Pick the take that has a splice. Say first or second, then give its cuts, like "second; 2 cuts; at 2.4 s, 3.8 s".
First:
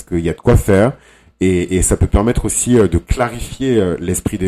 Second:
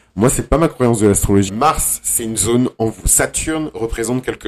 second; 2 cuts; at 1.5 s, 3.0 s